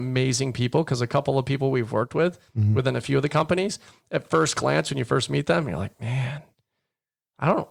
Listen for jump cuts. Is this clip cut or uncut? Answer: uncut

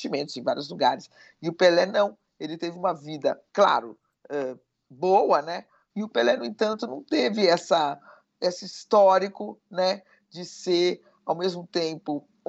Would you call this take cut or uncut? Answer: cut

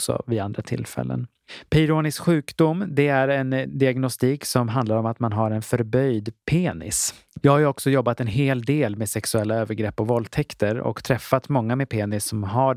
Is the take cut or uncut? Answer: cut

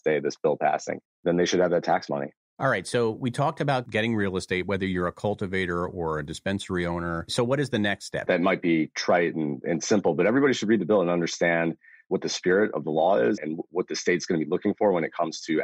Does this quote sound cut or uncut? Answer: cut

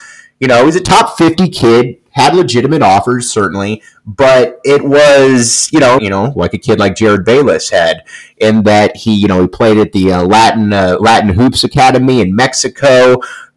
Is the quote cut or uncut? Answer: cut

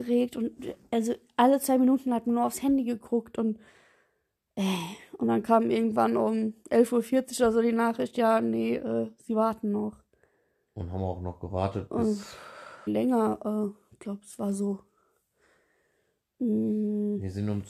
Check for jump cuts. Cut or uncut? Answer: cut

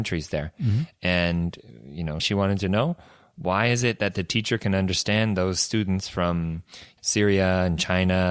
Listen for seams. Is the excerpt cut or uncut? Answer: cut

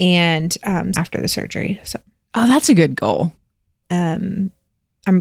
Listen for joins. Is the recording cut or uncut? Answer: cut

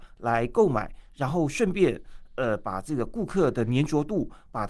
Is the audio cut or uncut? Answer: uncut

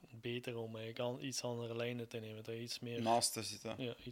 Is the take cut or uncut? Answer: uncut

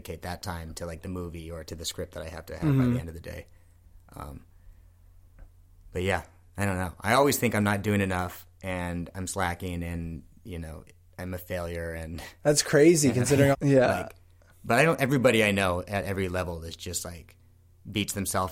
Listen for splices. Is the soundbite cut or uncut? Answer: cut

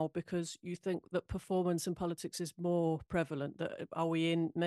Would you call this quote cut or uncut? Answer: uncut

